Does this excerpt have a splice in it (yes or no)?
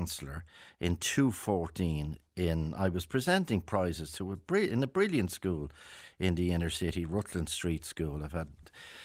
no